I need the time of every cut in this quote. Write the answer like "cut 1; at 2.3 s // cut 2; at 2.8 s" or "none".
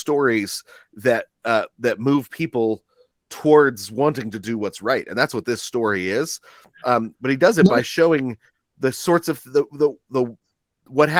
none

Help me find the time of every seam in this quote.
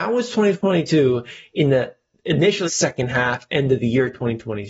cut 1; at 2.6 s

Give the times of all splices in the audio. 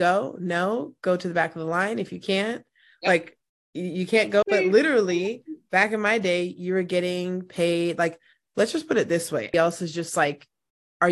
cut 1; at 4.4 s // cut 2; at 9.5 s

